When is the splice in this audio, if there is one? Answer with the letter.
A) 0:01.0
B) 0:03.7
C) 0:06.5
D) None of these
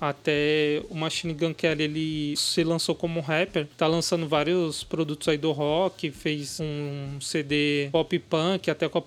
D